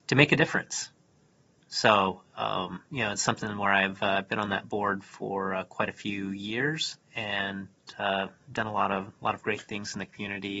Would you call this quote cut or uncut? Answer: uncut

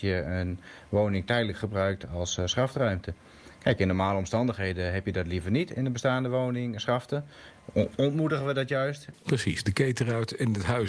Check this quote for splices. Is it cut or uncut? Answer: cut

